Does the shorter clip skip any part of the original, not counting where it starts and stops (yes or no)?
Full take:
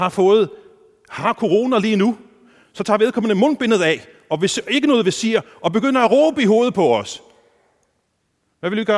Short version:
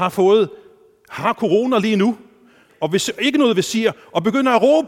yes